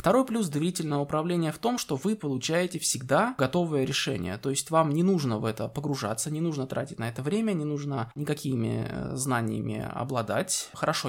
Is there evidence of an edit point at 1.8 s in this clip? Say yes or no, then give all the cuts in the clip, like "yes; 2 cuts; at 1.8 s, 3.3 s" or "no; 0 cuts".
no; 0 cuts